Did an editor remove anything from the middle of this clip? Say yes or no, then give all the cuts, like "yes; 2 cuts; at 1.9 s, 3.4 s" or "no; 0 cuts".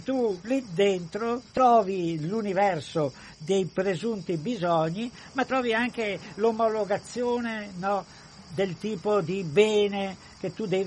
yes; 1 cut; at 1.5 s